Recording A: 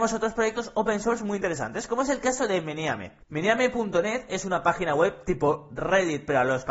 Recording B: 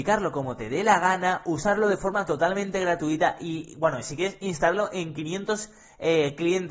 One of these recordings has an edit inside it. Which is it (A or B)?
A